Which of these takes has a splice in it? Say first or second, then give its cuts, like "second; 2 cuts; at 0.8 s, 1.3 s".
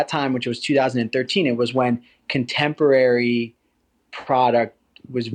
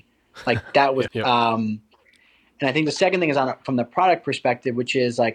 second; 1 cut; at 1.1 s